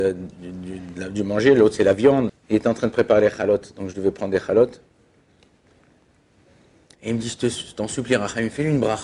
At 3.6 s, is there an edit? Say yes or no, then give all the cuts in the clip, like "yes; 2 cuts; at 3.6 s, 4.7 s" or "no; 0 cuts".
no; 2 cuts; at 2.3 s, 6.9 s